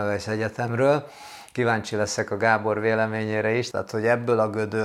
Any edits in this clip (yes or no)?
yes